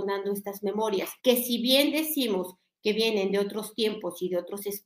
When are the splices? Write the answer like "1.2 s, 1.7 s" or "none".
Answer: 1.2 s